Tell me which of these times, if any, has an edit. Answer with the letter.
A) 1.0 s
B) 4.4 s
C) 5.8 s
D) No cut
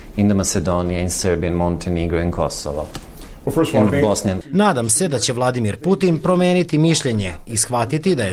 B